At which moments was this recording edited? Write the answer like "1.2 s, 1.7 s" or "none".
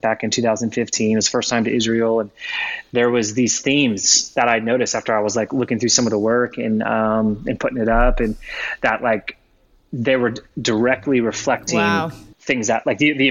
none